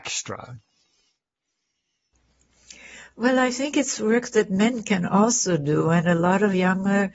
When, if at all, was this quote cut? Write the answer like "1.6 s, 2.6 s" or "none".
none